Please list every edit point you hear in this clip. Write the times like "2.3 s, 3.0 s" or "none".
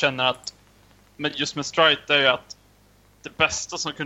none